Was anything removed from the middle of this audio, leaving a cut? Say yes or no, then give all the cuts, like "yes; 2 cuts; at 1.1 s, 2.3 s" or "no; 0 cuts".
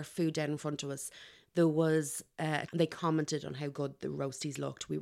yes; 1 cut; at 2.7 s